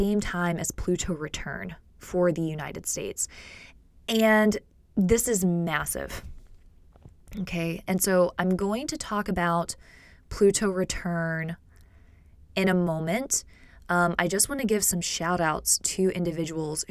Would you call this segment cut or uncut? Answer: uncut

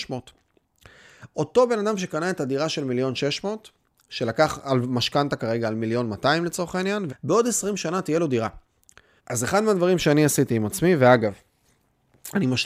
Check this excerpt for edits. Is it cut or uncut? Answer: cut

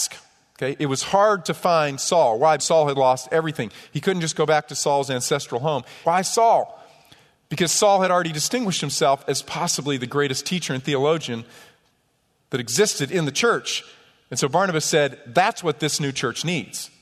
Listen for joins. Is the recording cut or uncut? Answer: cut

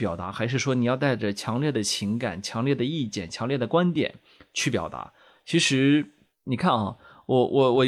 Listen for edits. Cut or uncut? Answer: uncut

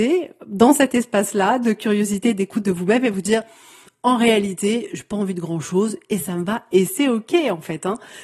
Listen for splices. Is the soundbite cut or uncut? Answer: uncut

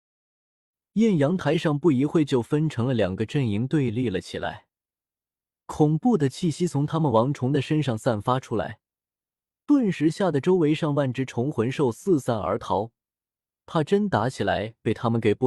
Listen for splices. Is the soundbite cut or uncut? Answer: uncut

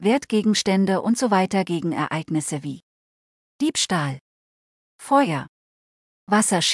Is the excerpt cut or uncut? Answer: uncut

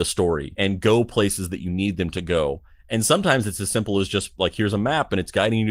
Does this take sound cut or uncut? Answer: uncut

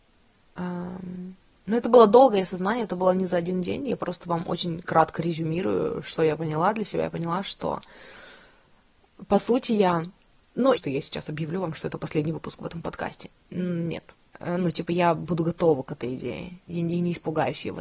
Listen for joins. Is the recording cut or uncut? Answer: cut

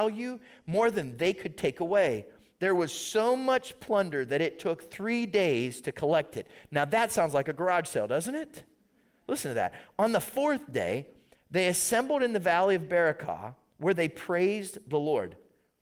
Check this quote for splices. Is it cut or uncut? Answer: uncut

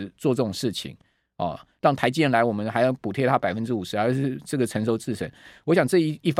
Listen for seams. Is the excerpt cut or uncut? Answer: uncut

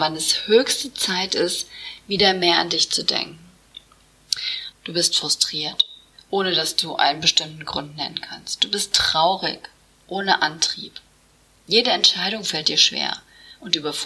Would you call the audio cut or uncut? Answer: cut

